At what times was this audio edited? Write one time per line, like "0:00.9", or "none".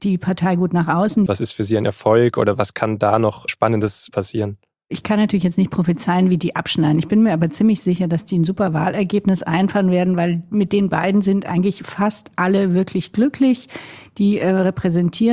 0:01.3